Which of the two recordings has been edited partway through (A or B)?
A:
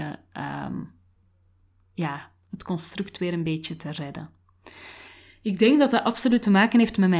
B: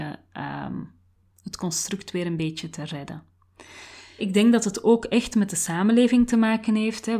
B